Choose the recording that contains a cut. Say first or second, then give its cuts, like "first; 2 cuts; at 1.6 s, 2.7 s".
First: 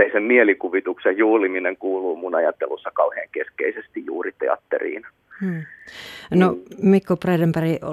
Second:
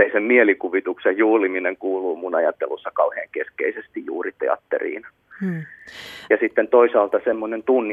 second; 1 cut; at 6.3 s